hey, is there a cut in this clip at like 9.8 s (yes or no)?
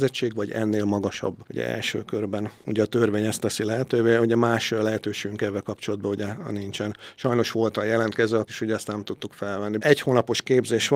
yes